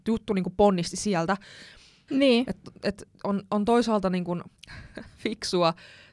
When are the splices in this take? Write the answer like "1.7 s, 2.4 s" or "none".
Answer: 2.1 s, 4.6 s